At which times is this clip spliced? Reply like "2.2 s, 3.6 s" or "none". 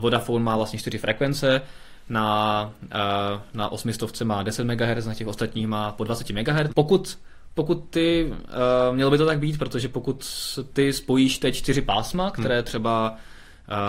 6.7 s